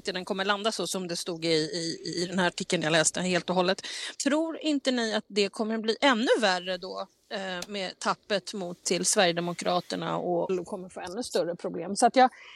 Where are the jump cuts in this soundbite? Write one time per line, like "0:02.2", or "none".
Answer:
0:04.1
0:08.8
0:10.5